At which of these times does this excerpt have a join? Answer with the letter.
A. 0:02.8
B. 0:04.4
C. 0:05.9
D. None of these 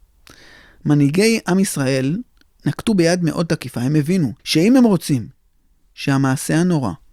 B